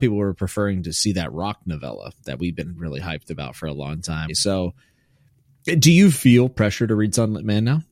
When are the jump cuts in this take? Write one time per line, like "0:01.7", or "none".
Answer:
0:02.8
0:04.3